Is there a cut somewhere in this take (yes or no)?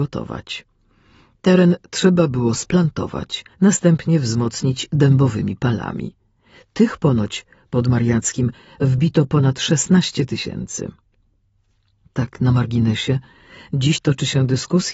yes